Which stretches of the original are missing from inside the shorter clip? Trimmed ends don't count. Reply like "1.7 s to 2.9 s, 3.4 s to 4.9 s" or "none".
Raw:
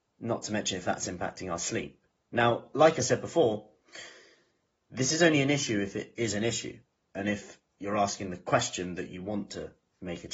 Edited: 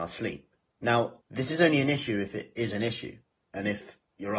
2.7 s to 4.8 s